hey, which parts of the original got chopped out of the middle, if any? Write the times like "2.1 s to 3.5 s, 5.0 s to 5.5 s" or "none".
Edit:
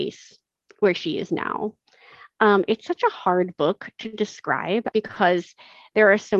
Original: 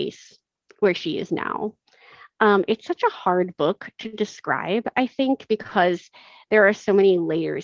4.9 s to 5.5 s